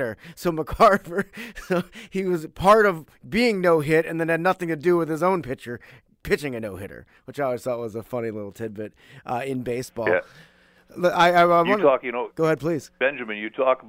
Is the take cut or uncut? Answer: uncut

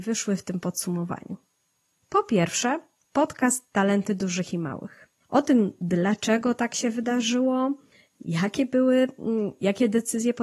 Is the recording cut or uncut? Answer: cut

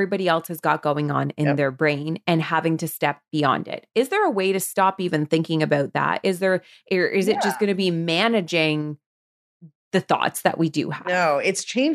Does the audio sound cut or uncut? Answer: uncut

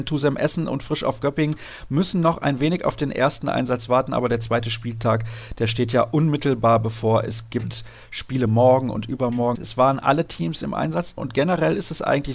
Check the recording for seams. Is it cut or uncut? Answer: cut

